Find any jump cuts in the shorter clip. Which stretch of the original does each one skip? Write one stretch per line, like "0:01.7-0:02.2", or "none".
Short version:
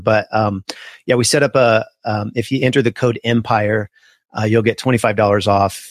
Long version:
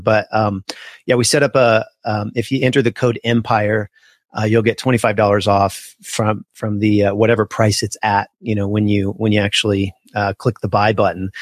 none